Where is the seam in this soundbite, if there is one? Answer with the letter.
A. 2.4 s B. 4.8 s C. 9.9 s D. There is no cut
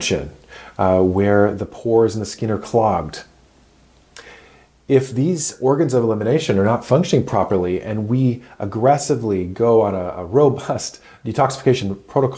D